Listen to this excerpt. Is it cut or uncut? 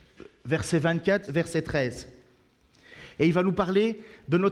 cut